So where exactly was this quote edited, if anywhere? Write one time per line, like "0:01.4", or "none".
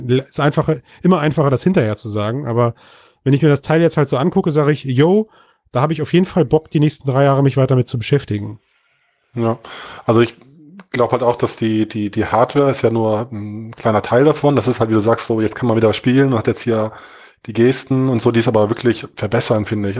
none